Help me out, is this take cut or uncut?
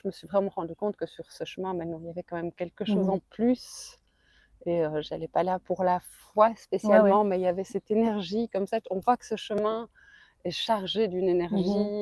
uncut